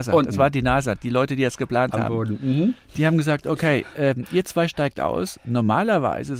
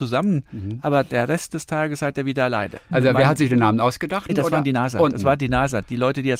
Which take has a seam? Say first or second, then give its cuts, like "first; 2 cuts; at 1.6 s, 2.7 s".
second; 2 cuts; at 2.9 s, 4.3 s